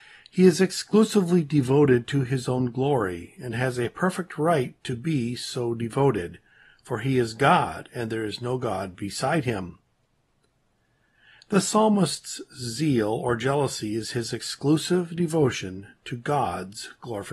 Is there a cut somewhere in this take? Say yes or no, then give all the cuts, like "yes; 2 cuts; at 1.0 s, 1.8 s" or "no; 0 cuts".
no; 0 cuts